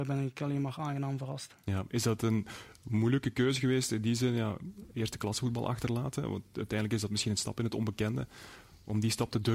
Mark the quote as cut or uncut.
uncut